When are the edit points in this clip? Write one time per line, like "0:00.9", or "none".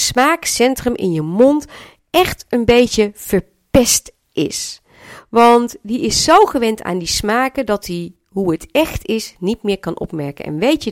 none